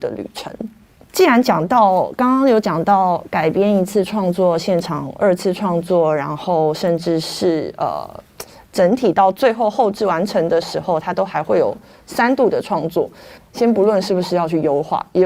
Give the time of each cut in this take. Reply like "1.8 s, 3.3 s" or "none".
13.4 s